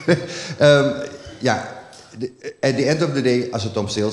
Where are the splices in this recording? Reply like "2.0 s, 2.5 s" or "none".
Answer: none